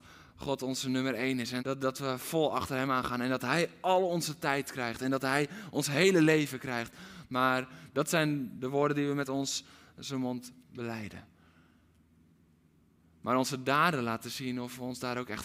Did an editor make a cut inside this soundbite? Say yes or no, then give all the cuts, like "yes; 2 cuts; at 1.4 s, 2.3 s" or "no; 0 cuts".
yes; 1 cut; at 1.6 s